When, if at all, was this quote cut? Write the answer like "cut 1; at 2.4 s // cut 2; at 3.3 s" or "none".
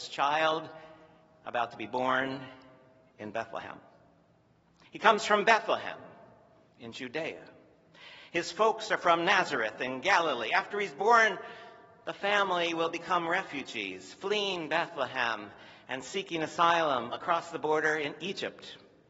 cut 1; at 4.8 s